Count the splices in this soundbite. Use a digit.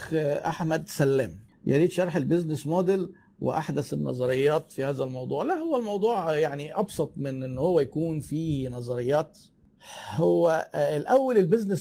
0